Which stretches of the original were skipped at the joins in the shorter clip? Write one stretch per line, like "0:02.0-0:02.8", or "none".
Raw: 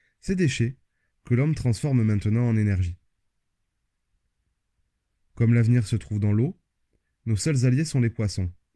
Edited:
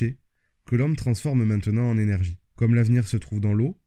0:03.1-0:05.3